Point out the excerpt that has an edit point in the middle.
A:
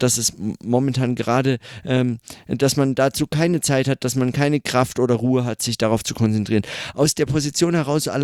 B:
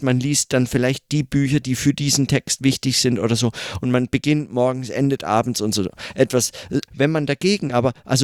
B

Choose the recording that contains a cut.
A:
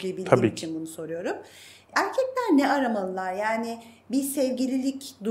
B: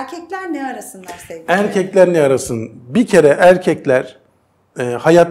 A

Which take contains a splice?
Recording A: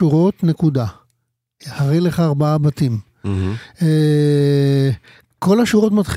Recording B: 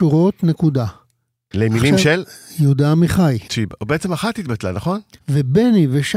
B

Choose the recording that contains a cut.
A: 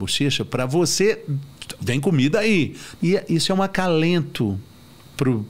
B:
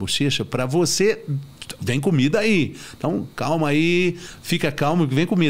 A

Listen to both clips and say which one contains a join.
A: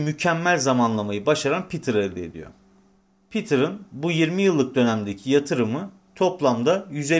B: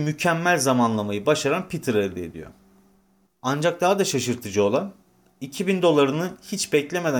B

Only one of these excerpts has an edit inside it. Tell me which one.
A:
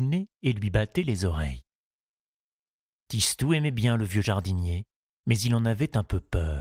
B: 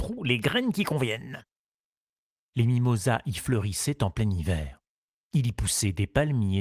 B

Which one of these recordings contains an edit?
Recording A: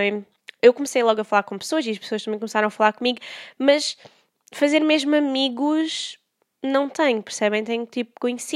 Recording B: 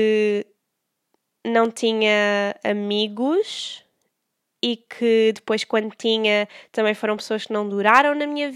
A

